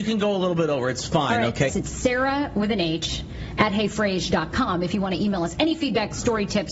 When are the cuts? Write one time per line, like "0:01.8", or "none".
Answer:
0:01.7